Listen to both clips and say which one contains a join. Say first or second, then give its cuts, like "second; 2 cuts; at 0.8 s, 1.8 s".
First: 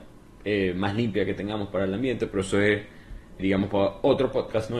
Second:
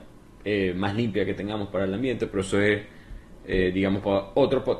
first; 1 cut; at 3.4 s